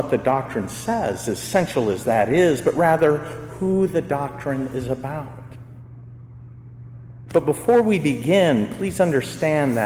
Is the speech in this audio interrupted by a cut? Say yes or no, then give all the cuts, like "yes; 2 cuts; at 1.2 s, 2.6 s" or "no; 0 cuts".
no; 0 cuts